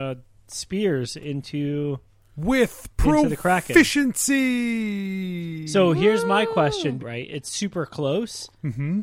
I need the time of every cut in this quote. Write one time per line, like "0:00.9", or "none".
0:07.0